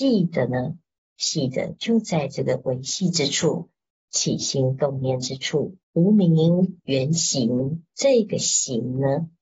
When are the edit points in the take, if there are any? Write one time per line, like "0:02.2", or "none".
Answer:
0:05.8
0:07.9